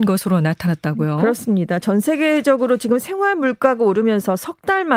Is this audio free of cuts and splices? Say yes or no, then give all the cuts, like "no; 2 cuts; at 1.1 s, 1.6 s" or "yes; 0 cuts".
yes; 0 cuts